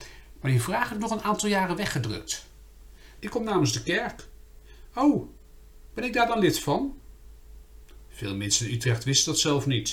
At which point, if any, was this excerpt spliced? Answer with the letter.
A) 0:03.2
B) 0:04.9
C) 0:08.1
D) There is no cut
A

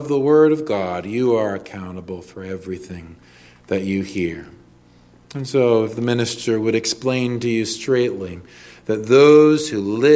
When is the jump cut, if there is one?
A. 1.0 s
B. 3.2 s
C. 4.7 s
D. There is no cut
D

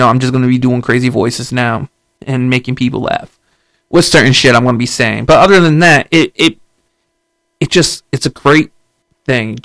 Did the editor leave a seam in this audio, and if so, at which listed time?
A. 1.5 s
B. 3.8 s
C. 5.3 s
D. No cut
D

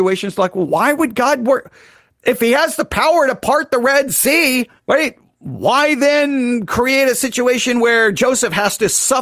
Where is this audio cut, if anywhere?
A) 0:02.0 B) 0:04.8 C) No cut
B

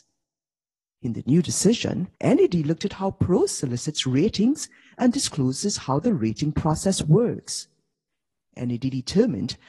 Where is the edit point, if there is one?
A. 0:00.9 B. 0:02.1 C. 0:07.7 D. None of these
B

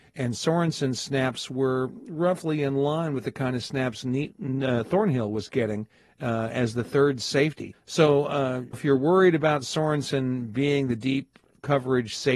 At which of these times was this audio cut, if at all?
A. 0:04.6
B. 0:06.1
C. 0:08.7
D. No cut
C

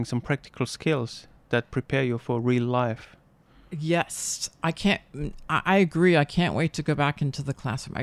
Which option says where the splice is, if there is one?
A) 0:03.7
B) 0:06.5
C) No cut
C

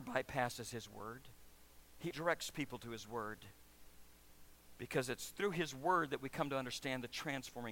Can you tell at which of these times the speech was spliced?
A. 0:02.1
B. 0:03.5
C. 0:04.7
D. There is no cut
A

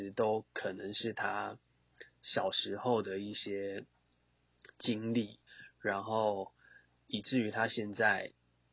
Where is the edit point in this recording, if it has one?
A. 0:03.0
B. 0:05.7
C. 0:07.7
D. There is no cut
D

